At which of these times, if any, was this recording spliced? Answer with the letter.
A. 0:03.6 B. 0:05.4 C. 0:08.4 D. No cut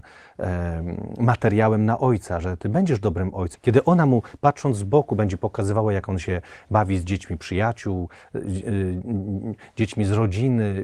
A